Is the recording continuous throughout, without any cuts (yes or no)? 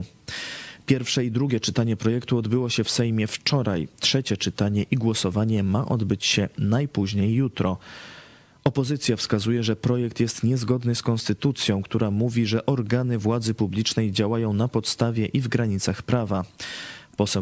yes